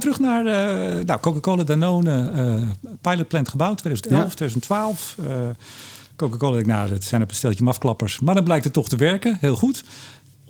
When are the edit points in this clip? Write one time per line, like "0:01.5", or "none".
none